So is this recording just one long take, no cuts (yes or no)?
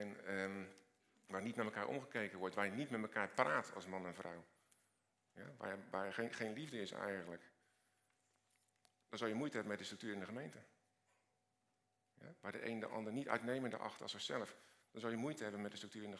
yes